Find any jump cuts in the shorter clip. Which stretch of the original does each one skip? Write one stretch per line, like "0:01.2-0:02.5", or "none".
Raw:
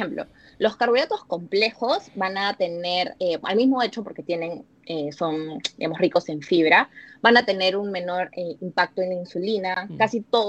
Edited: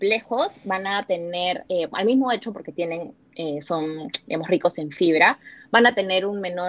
none